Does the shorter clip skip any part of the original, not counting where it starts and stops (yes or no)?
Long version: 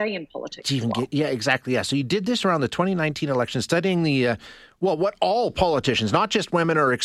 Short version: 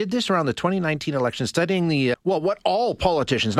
yes